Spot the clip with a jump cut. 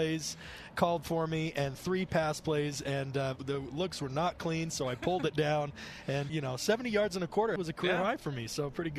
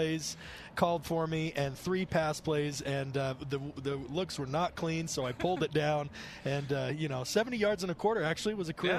first; 3 cuts; at 3.4 s, 6.3 s, 7.6 s

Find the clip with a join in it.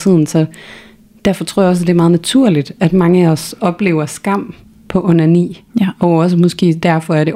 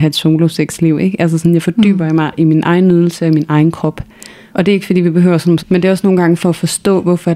second; 2 cuts; at 4.5 s, 5.6 s

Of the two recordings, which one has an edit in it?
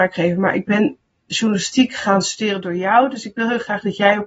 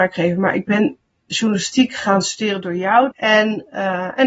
second; 1 cut; at 3.1 s

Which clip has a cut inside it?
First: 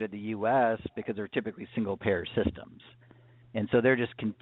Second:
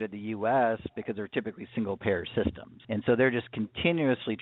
second; 1 cut; at 2.8 s

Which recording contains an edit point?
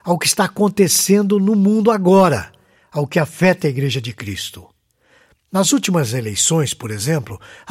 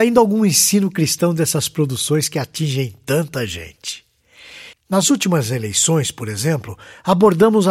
second; 1 cut; at 4.7 s

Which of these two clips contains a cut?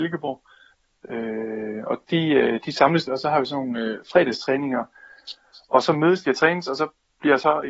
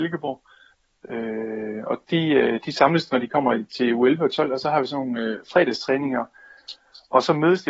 first; 1 cut; at 3.1 s

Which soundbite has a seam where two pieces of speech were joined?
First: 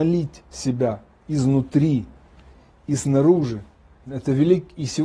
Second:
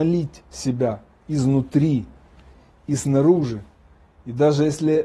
first; 1 cut; at 4.0 s

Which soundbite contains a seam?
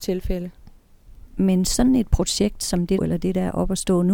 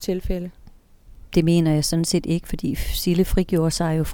first; 2 cuts; at 1.3 s, 3.0 s

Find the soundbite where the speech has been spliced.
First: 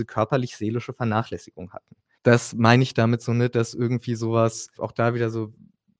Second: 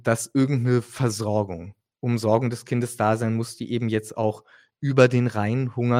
first; 2 cuts; at 2.2 s, 4.8 s

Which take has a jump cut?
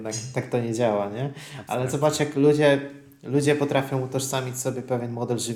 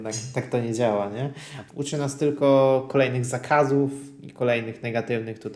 second; 1 cut; at 1.7 s

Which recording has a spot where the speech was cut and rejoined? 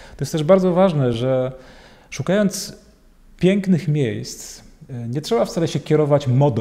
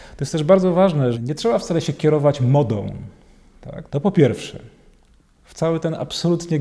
second; 2 cuts; at 1.1 s, 3.9 s

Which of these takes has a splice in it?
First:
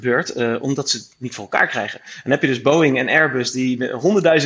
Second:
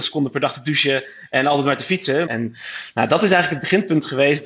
second; 1 cut; at 2.3 s

